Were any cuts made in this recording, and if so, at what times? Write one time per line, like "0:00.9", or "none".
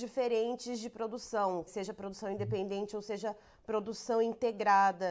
0:01.7

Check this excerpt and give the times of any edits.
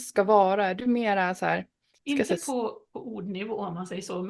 0:02.9

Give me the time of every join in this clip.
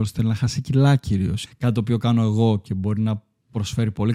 0:01.4

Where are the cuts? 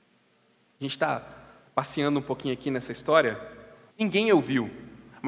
0:03.9

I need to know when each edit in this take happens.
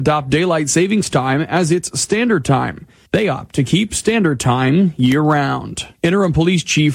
0:03.1
0:05.9

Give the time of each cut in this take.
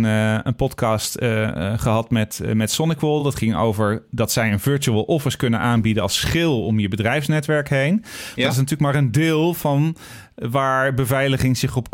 none

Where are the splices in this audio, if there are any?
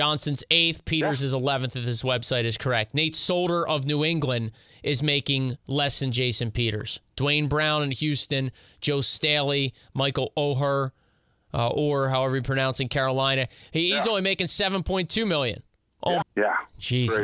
0:16.2

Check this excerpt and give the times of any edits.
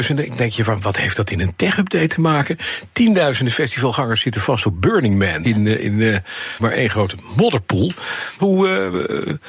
0:05.4
0:06.6
0:08.4

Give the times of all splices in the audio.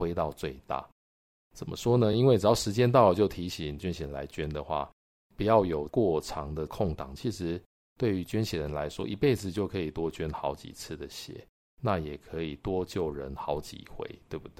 none

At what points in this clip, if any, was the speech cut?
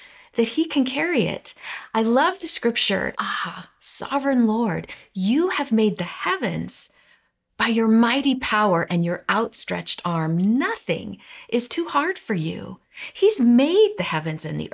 0:03.1

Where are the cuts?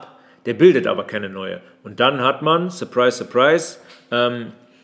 none

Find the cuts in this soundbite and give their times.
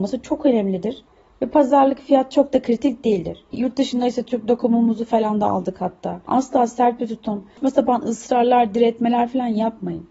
0:03.5
0:06.3

